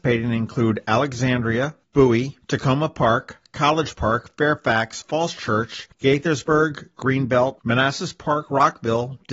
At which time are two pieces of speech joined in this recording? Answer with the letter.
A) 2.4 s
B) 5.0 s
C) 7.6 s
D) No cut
C